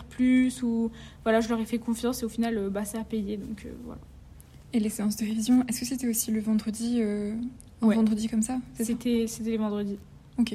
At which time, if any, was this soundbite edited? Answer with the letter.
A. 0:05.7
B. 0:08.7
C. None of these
C